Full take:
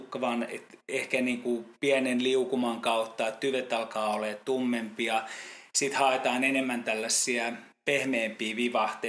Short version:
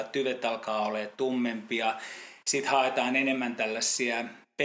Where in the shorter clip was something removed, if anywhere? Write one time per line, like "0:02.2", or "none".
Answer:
none